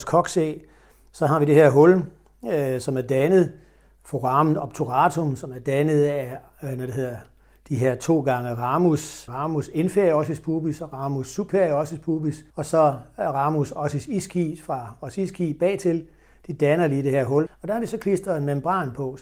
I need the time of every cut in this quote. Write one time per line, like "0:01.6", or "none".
0:09.3
0:12.5
0:17.5